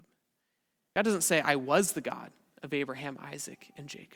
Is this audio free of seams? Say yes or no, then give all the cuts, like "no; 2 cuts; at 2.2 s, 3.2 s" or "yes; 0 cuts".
yes; 0 cuts